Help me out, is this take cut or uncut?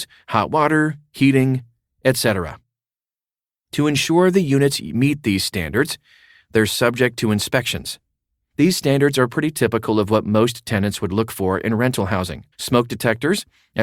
cut